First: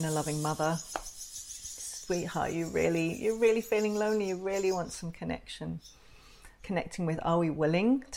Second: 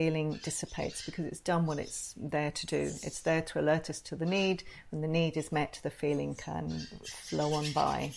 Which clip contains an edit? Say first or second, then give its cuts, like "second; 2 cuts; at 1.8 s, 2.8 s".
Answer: first; 1 cut; at 6.6 s